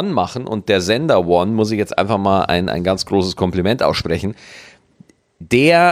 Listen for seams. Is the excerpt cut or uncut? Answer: uncut